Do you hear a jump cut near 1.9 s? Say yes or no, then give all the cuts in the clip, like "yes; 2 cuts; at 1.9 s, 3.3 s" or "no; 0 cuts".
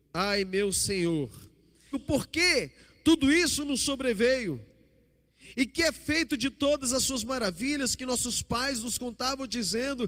yes; 1 cut; at 1.9 s